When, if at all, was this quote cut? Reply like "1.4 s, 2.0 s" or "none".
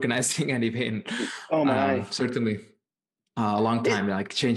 none